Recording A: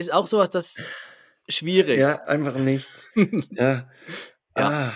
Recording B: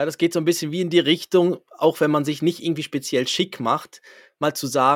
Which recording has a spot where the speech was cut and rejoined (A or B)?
A